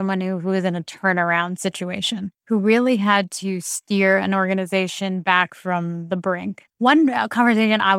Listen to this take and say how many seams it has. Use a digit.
2